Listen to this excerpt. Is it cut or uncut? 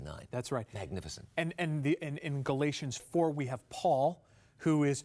cut